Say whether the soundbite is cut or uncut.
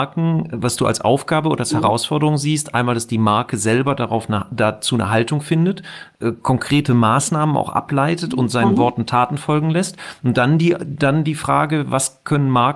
uncut